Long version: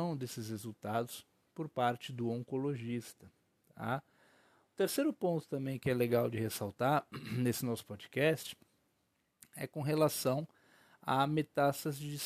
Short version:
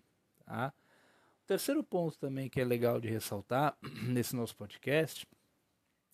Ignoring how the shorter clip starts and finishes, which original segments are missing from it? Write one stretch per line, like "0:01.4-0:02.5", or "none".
none